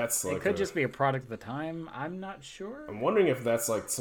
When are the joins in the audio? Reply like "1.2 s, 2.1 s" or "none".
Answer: none